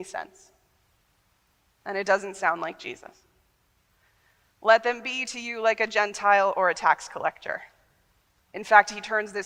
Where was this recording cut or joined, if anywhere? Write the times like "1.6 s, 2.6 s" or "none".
8.4 s